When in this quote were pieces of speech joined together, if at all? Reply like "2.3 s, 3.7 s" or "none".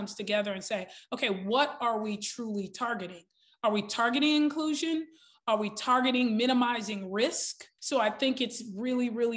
7.8 s